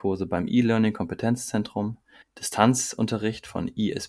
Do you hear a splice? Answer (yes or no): yes